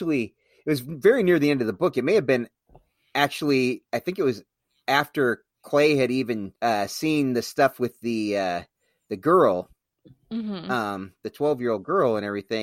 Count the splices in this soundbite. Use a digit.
1